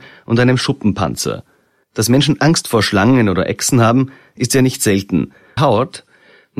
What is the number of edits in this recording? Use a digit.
2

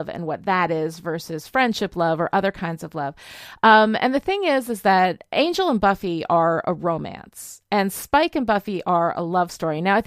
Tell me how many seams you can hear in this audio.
0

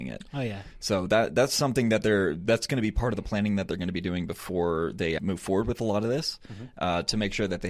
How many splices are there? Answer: 1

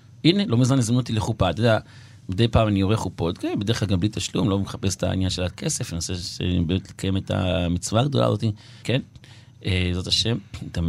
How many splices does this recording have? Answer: 1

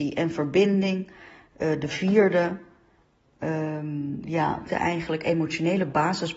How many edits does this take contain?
1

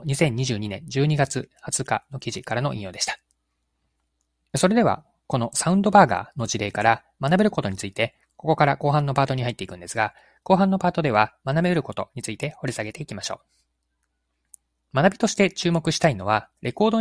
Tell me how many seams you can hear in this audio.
0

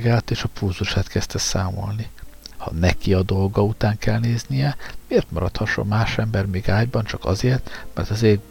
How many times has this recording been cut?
1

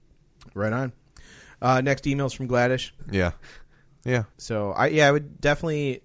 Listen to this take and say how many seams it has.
2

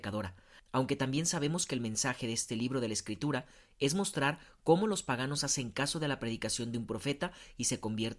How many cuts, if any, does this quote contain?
0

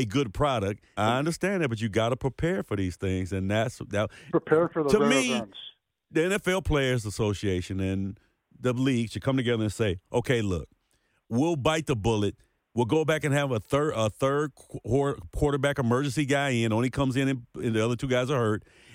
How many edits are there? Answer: 1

